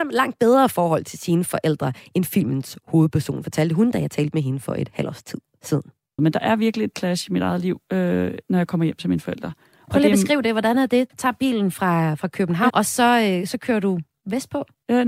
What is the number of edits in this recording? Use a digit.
3